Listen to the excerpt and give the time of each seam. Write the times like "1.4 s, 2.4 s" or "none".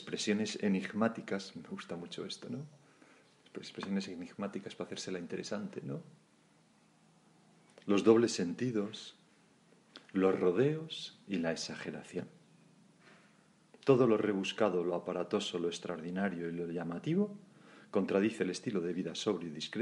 none